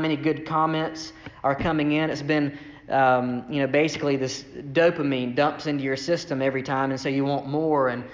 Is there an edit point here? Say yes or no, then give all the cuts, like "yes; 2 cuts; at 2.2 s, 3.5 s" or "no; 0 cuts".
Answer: no; 0 cuts